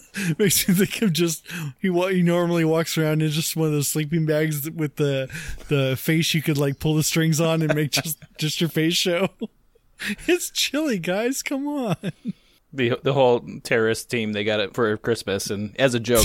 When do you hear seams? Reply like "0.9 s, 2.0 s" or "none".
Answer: none